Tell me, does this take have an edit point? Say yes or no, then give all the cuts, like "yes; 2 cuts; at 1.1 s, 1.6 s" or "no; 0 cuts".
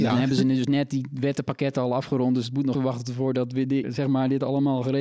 yes; 2 cuts; at 2.7 s, 3.8 s